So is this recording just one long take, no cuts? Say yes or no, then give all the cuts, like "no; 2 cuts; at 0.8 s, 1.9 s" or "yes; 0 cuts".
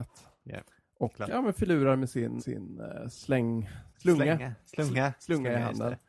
no; 3 cuts; at 1.3 s, 2.4 s, 3.9 s